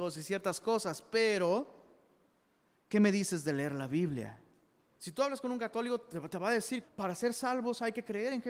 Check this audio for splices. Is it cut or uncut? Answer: cut